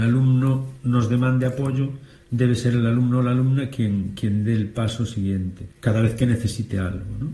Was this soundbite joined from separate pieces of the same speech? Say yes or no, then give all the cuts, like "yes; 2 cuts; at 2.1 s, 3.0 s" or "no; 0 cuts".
yes; 1 cut; at 5.7 s